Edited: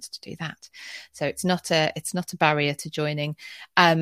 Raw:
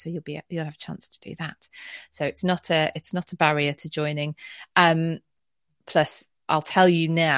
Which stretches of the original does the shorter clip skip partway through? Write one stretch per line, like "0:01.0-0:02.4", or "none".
none

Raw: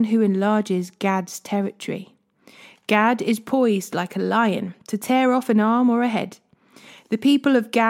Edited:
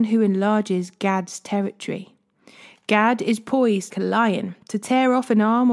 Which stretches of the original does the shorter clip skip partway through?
0:03.9-0:04.1

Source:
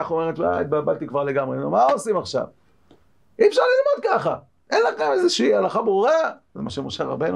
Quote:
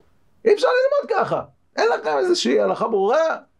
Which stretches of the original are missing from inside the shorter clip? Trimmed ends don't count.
none

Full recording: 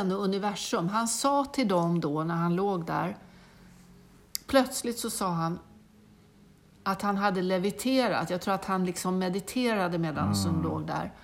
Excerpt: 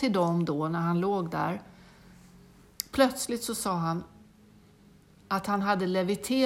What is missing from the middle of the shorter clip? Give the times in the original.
none

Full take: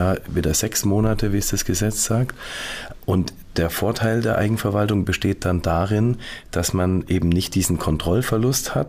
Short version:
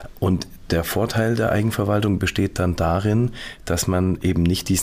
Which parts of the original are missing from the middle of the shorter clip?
none

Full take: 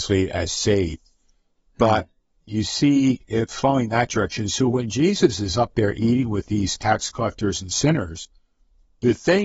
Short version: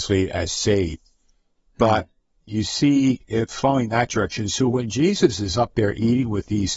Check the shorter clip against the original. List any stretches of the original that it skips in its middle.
none

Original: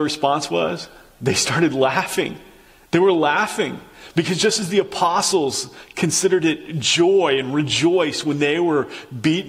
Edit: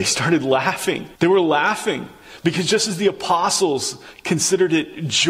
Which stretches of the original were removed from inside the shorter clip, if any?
0:02.5-0:02.9

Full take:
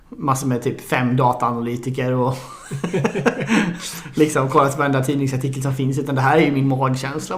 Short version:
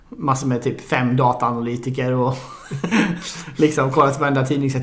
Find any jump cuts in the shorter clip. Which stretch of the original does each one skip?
0:02.9-0:03.5

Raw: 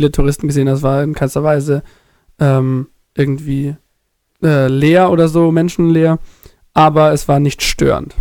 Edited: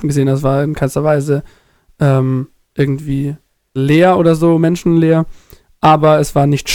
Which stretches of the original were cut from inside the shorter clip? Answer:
0:04.1-0:04.7

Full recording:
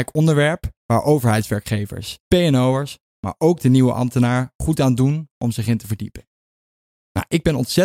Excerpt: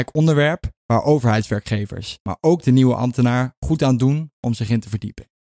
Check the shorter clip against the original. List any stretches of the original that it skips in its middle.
0:02.2-0:03.2

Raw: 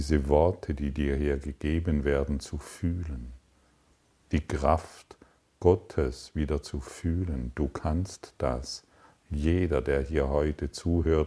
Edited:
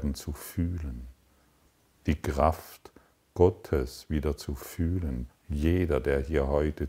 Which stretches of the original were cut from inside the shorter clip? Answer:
0:07.5-0:09.1

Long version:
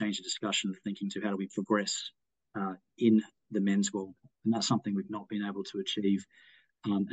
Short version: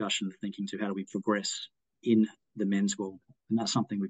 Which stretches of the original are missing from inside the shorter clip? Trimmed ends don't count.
0:02.3-0:02.9

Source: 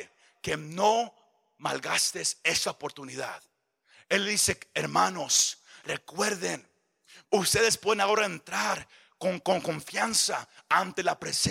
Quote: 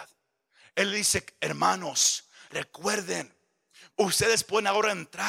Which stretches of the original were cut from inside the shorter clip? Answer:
none

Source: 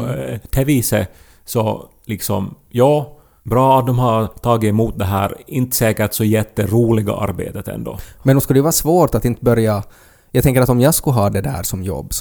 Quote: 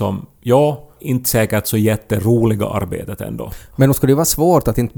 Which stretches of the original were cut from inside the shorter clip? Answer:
0:03.3-0:05.4

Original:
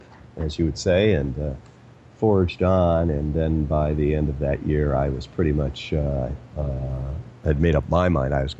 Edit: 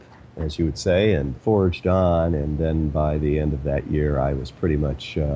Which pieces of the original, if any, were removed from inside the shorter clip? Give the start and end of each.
0:01.3-0:02.1

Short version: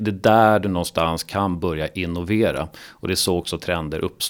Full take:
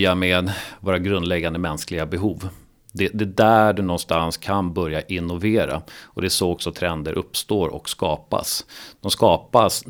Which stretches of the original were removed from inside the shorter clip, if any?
none

